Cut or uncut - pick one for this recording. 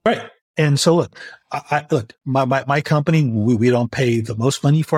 uncut